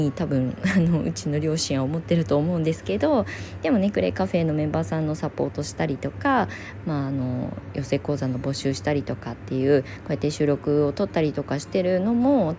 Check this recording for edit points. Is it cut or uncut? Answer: uncut